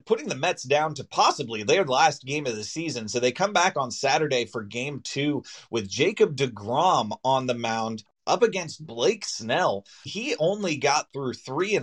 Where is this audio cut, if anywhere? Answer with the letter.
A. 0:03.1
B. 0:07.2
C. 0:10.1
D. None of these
C